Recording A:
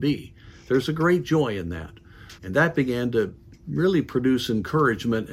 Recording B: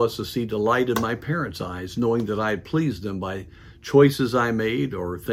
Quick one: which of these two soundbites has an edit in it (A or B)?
A